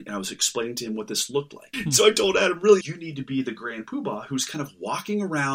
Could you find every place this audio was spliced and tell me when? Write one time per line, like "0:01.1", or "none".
0:01.7
0:02.8

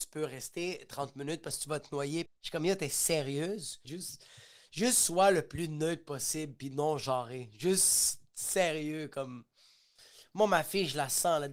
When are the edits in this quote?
0:02.3
0:03.8

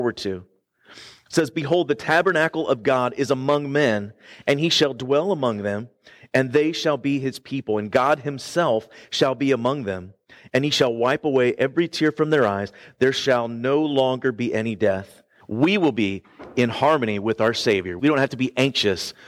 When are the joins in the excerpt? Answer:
0:15.4
0:18.0

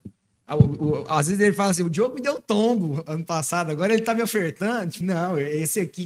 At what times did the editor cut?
0:05.0

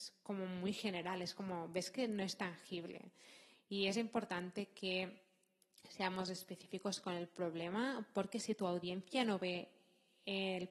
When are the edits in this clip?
none

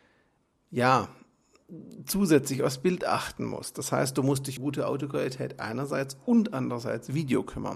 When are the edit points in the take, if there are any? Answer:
0:04.6

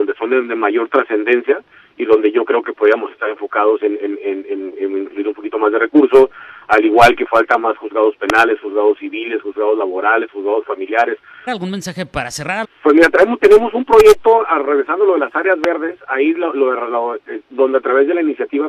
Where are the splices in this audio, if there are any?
0:11.5
0:12.6
0:17.4

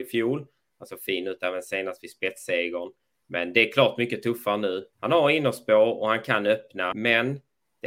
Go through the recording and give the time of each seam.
0:04.9
0:06.9

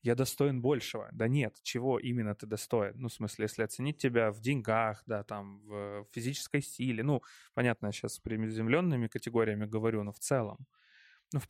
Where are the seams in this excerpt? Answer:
none

